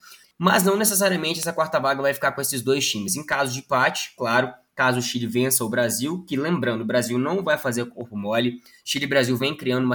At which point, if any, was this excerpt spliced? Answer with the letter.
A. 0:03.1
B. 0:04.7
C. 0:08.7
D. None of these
D